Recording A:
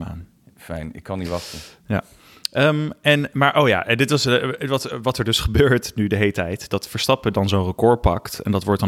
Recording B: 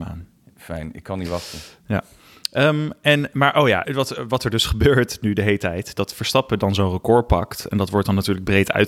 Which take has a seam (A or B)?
B